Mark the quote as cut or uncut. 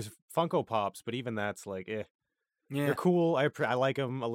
uncut